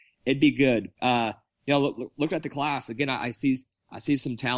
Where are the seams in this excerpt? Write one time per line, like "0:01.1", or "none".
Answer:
0:00.9